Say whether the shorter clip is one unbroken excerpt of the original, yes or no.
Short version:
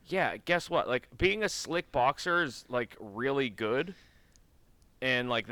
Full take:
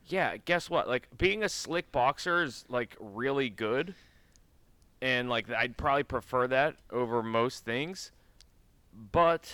yes